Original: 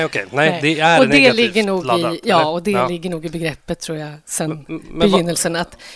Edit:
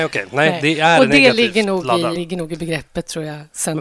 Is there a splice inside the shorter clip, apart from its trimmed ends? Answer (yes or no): yes